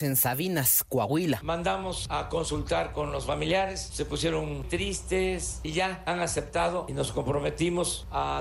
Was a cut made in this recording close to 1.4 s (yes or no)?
no